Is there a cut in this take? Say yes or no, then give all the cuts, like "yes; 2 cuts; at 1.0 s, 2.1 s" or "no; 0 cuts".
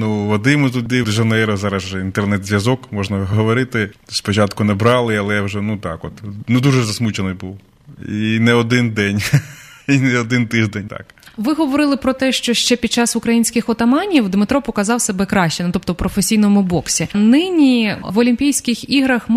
yes; 2 cuts; at 1.0 s, 10.9 s